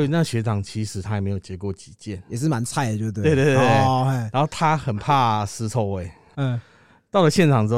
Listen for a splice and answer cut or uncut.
cut